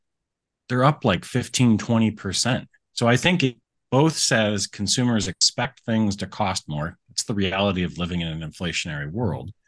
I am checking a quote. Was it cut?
no; 0 cuts

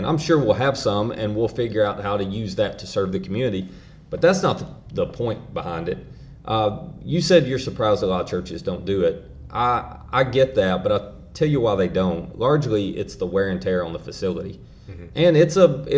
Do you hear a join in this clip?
no; 0 cuts

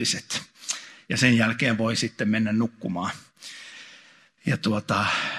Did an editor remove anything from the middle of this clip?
no; 0 cuts

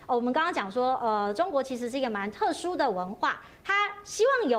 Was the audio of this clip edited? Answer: no; 0 cuts

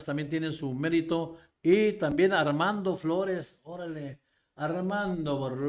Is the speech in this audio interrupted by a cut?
yes; 1 cut; at 1.5 s

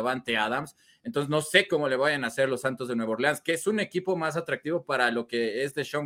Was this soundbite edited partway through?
no; 0 cuts

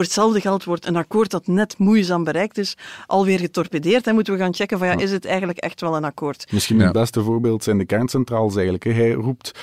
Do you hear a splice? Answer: no; 0 cuts

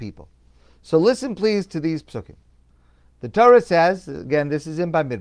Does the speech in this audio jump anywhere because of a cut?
no; 0 cuts

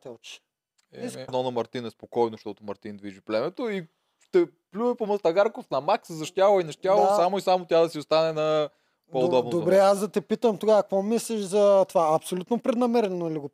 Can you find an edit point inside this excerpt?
yes; 1 cut; at 1.3 s

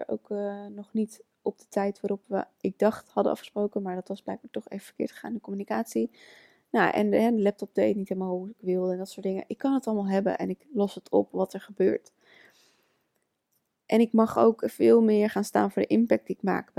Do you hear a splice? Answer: no; 0 cuts

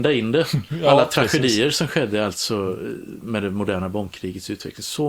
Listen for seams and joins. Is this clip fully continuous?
yes; 0 cuts

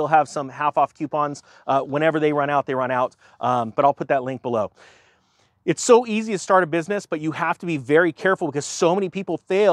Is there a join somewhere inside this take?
no; 0 cuts

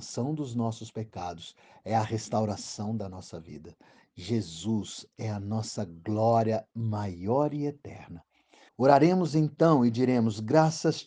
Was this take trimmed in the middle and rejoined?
yes; 1 cut; at 8.7 s

